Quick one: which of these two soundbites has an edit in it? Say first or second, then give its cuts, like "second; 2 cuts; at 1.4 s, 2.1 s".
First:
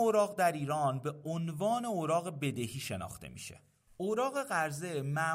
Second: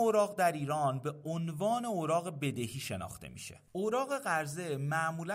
second; 1 cut; at 3.7 s